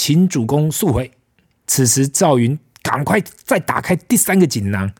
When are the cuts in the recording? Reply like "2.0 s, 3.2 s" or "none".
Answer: 1.6 s